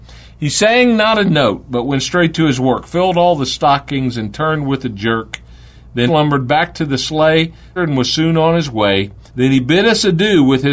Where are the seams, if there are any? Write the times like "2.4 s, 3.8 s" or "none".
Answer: 6.1 s, 7.8 s, 9.3 s